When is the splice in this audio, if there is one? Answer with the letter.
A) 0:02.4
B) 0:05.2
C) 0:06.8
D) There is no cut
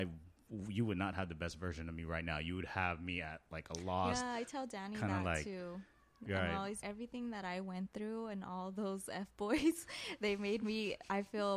C